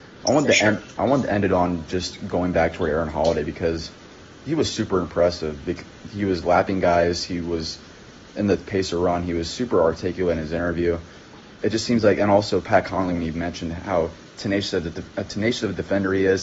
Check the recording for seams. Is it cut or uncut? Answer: cut